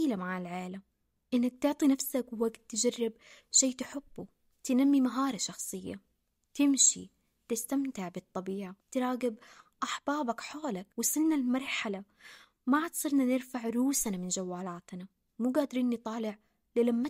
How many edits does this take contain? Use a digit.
2